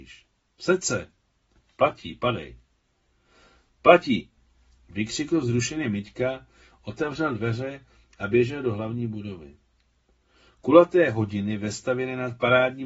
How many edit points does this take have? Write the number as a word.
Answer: zero